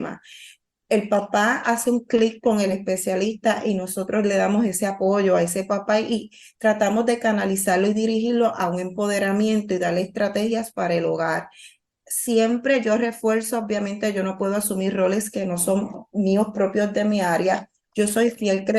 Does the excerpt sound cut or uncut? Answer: uncut